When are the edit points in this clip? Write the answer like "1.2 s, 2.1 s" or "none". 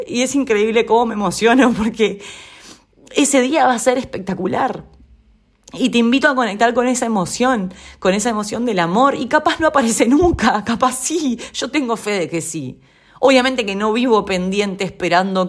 none